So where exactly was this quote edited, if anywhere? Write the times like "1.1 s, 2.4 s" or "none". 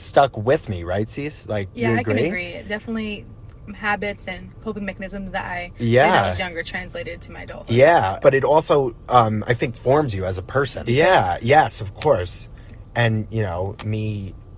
8.2 s, 10.8 s